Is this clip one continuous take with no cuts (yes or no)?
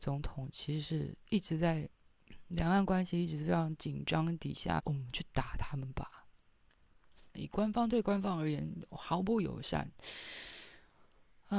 no